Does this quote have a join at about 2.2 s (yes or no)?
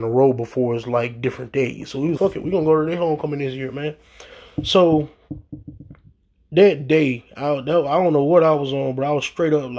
yes